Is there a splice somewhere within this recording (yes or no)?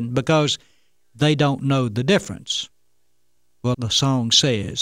yes